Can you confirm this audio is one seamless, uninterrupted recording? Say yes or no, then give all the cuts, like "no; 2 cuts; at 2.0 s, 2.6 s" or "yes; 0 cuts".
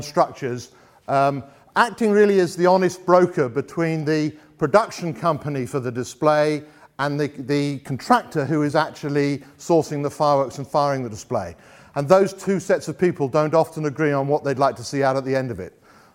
yes; 0 cuts